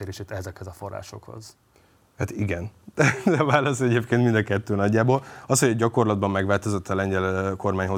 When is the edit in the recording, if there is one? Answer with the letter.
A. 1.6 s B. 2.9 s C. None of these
C